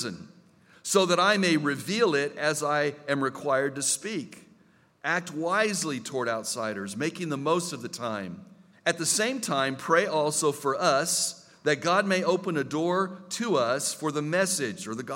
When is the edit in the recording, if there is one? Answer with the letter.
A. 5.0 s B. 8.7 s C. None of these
B